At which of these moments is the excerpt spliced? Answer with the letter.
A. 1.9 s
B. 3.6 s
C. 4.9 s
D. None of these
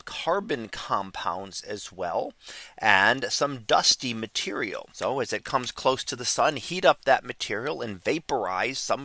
C